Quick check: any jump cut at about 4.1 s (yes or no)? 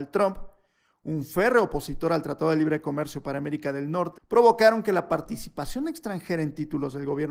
yes